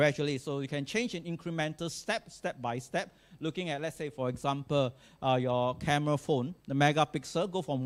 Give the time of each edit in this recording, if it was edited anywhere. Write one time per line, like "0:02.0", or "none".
0:06.6

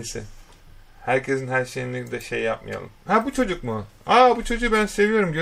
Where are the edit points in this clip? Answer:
0:02.9

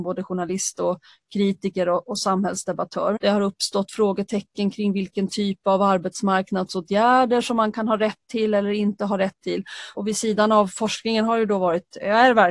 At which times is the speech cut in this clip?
0:03.2
0:09.9

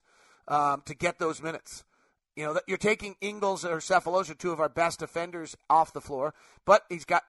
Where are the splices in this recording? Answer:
none

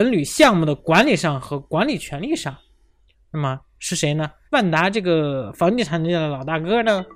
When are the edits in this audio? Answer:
0:04.5

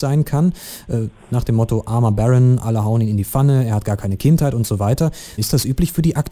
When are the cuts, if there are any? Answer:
0:05.4

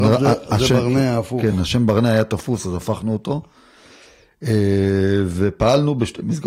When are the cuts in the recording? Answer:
none

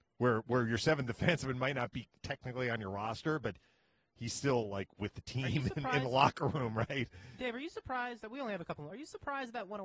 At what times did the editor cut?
none

